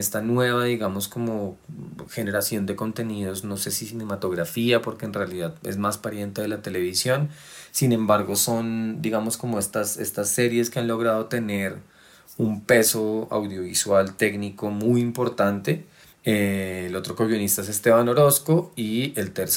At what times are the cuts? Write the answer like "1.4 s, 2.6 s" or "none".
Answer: 16.1 s